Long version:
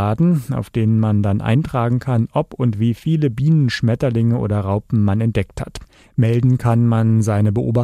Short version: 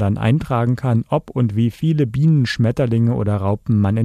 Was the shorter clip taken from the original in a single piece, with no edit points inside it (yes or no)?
yes